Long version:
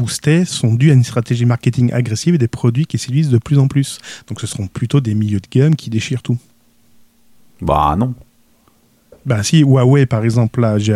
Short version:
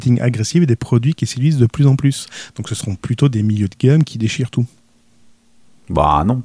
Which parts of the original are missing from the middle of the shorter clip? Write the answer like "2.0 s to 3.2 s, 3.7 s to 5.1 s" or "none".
none